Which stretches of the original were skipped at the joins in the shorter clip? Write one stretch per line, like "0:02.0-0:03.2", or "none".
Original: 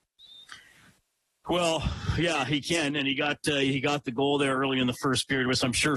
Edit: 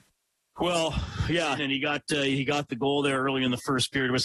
0:02.4-0:02.9